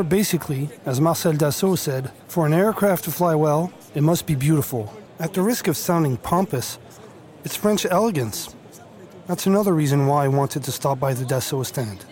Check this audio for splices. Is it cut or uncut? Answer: cut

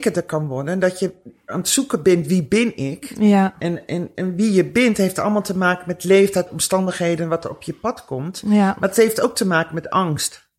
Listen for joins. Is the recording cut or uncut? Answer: uncut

